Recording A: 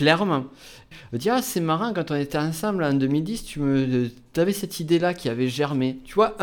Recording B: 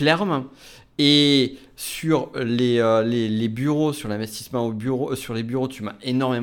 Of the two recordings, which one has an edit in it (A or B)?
A